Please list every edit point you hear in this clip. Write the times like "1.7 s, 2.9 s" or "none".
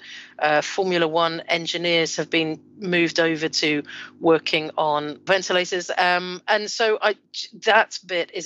none

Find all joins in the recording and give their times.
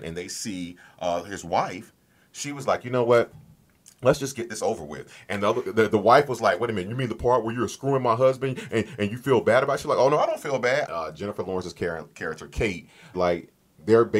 10.9 s, 13.1 s

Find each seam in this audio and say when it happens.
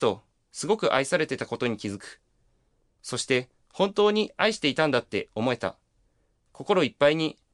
none

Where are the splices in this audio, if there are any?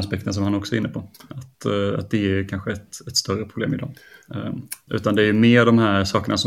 4.9 s

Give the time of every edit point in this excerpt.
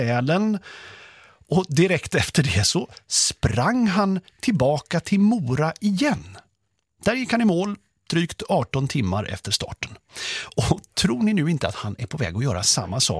none

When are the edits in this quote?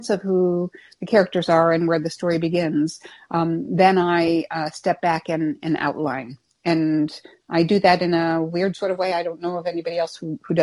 none

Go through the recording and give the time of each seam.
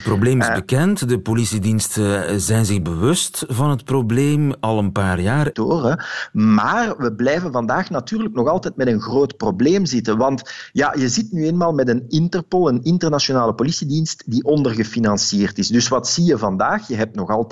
5.5 s

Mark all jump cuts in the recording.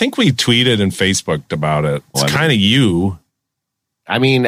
2.1 s

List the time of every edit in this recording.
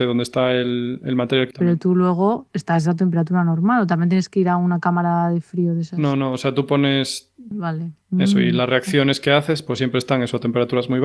1.5 s, 7.5 s

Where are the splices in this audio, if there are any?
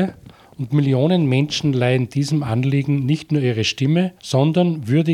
4.2 s

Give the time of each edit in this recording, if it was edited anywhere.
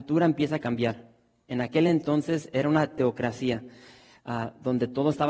none

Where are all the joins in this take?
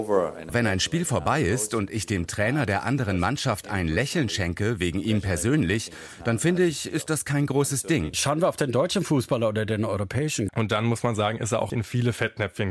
8.1 s, 10.5 s, 11.7 s

